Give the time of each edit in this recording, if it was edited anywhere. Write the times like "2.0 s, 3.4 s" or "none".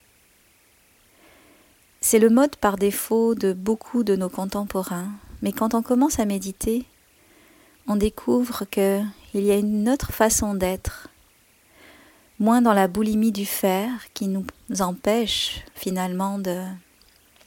none